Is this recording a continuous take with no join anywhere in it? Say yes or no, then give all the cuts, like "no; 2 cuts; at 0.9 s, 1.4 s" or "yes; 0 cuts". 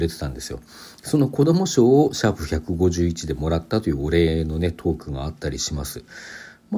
yes; 0 cuts